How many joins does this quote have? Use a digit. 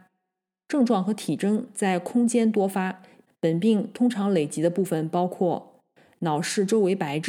1